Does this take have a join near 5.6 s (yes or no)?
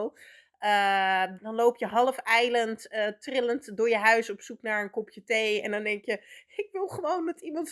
no